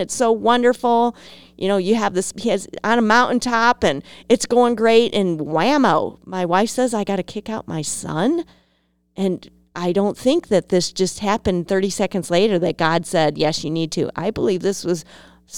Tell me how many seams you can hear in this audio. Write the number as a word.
zero